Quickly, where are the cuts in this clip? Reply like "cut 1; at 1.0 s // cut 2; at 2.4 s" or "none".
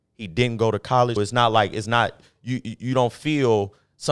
cut 1; at 1.2 s